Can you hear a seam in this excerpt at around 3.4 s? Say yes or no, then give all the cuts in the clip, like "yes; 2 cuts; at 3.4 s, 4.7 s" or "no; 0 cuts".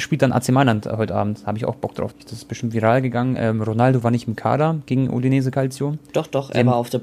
no; 1 cut; at 2.1 s